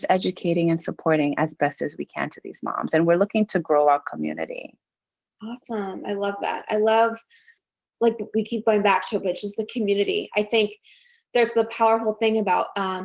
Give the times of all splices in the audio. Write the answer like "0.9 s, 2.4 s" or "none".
none